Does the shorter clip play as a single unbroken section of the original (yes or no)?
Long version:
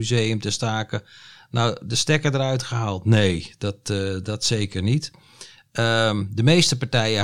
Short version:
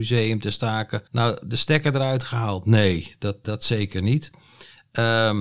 no